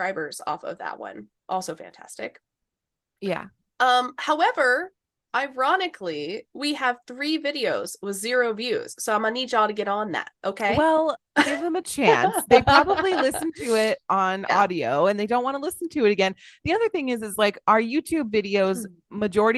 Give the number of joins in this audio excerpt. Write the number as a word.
zero